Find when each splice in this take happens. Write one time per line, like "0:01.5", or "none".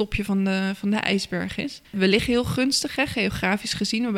0:01.8